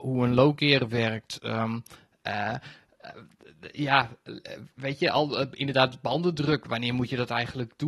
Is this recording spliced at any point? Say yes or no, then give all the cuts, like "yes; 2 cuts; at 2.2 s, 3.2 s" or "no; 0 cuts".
no; 0 cuts